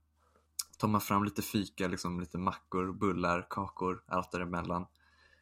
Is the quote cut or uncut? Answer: uncut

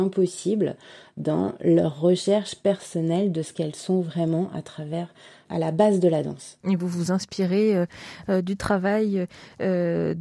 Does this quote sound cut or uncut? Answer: uncut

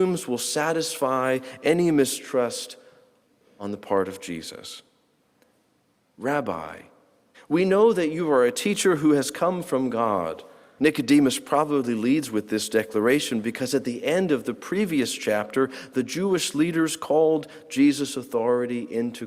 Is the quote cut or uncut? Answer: cut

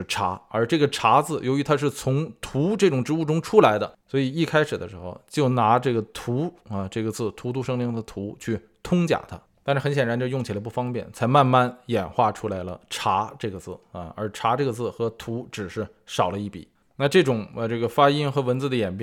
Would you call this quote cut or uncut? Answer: uncut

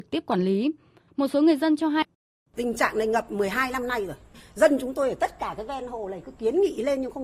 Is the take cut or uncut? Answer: cut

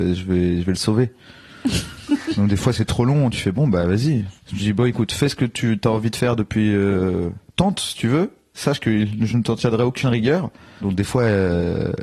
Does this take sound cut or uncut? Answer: cut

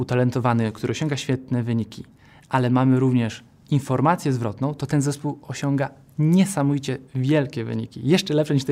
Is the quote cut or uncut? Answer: uncut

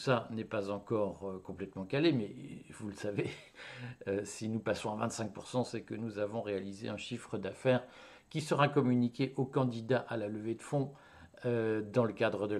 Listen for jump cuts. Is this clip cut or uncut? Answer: uncut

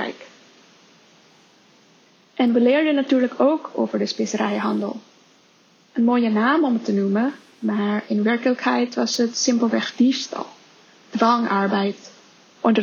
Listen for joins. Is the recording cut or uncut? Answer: uncut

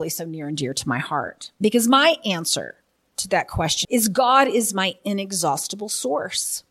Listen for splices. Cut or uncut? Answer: cut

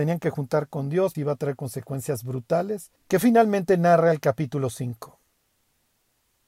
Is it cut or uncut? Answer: cut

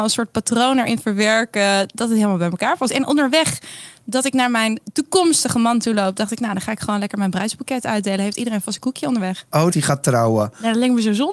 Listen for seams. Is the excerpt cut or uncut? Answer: cut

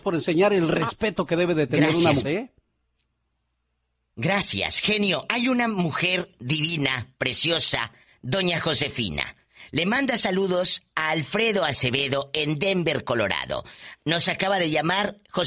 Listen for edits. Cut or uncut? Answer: cut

